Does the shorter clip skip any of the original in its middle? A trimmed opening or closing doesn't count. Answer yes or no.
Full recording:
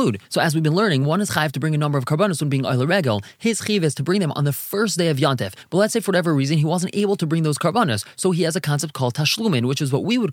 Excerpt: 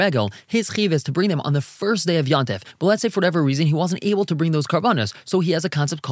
no